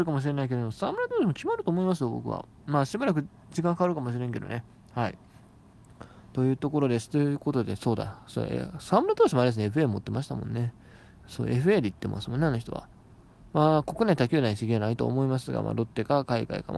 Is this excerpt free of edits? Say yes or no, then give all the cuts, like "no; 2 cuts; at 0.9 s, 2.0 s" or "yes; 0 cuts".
yes; 0 cuts